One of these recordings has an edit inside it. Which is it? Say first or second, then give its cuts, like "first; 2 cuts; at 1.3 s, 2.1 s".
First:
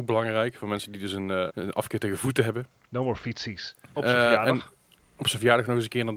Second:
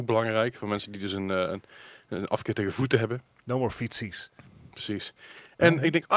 first; 2 cuts; at 1.5 s, 3.9 s